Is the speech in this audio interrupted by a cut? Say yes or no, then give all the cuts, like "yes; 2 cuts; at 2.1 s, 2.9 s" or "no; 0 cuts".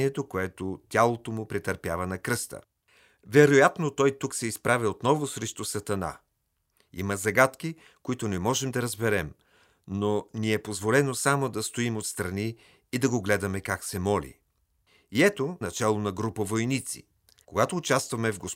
yes; 2 cuts; at 15.6 s, 17.4 s